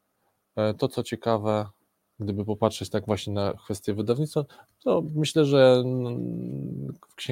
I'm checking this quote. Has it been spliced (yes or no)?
no